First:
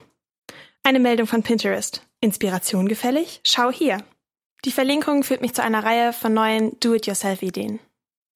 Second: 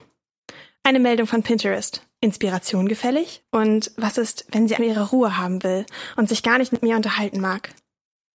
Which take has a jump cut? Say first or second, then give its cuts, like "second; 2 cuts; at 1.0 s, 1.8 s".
second; 2 cuts; at 3.4 s, 4.8 s